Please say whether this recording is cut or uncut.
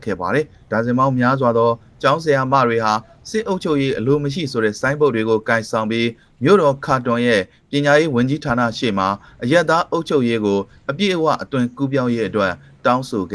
uncut